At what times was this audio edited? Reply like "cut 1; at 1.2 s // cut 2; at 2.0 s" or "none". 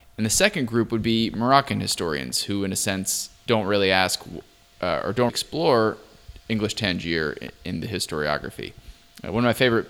cut 1; at 3.5 s // cut 2; at 5.3 s